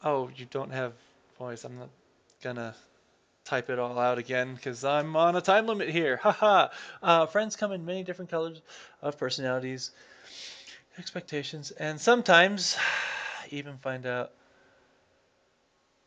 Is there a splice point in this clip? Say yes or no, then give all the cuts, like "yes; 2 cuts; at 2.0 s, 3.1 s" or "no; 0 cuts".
no; 0 cuts